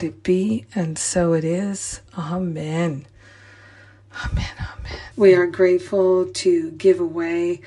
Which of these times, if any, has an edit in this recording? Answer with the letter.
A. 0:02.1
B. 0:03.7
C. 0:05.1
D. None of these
C